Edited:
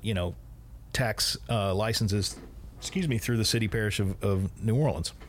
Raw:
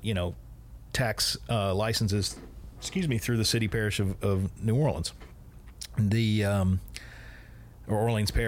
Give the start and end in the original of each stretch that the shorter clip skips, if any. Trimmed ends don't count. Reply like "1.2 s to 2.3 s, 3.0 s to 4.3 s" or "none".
none